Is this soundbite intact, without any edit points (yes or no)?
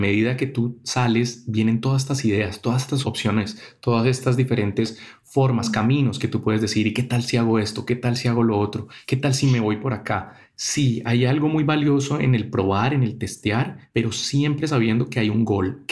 yes